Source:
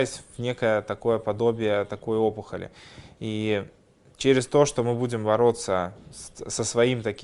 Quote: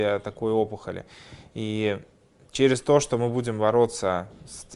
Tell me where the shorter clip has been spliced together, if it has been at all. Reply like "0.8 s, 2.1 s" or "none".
none